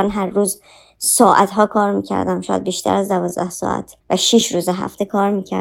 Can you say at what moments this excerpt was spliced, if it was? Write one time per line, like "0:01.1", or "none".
0:04.0